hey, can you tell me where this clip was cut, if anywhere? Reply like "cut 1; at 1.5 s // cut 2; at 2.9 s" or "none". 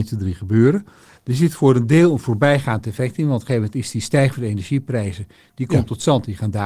cut 1; at 1.2 s